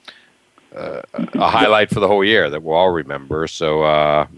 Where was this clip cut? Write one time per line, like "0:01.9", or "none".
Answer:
none